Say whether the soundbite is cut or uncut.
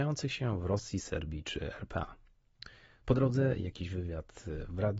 uncut